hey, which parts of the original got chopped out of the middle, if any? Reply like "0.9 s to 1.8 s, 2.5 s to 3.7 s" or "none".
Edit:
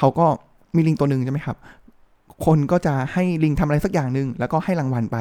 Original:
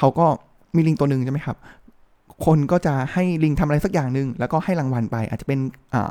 none